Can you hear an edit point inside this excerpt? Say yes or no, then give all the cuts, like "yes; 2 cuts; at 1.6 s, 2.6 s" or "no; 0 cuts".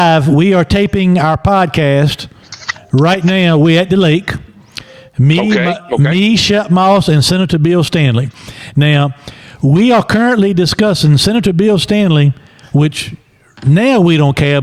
no; 0 cuts